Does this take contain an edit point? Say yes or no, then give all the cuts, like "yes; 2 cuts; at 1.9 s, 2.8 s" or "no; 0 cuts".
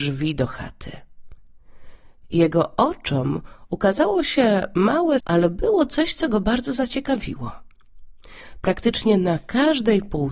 yes; 1 cut; at 5.2 s